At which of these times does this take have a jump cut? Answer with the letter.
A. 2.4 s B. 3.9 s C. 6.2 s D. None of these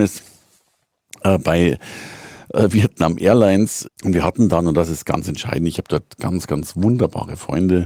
B